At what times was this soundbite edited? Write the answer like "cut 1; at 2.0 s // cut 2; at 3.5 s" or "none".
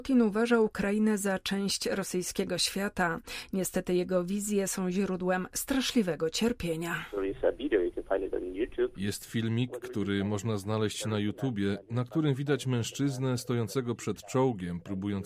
none